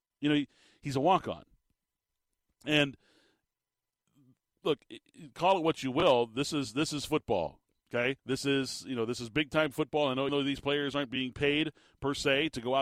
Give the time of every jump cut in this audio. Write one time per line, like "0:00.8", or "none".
0:08.2
0:10.3